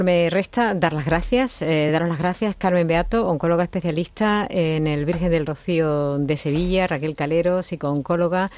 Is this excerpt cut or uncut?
uncut